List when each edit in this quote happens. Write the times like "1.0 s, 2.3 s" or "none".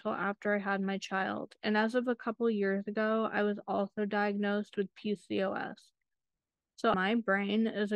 6.9 s